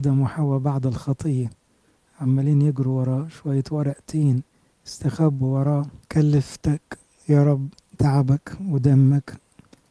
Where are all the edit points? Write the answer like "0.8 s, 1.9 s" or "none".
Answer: 6.0 s

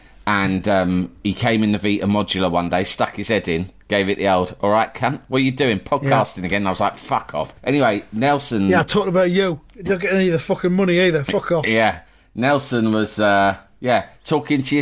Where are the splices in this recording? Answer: 7.6 s

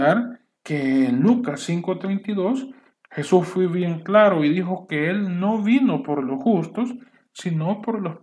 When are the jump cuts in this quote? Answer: none

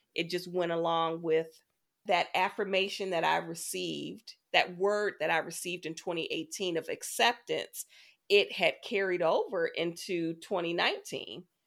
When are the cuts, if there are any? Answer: none

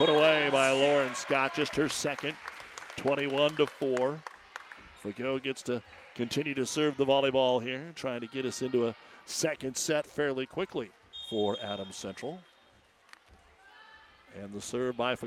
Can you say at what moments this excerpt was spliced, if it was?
none

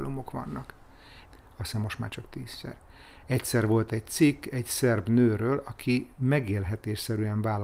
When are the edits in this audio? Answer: 1.2 s

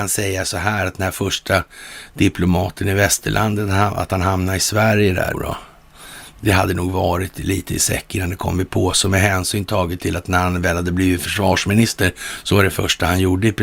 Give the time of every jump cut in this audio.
5.3 s

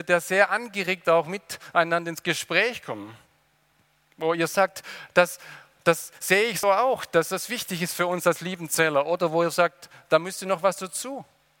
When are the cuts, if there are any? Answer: 6.6 s

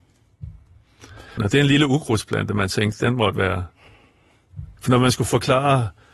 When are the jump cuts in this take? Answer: 1.4 s, 4.8 s

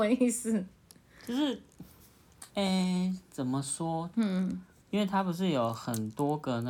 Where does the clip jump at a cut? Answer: 2.5 s, 4.1 s

